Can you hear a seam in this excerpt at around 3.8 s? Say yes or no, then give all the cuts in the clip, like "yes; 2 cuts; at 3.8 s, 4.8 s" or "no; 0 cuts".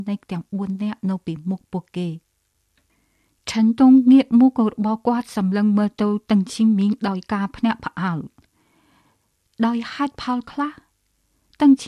no; 0 cuts